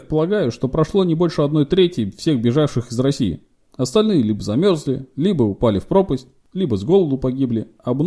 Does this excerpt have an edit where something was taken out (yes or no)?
no